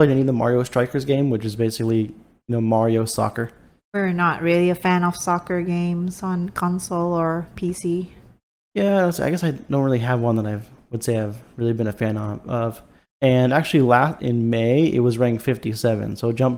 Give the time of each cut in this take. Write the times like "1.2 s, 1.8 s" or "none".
13.1 s, 14.2 s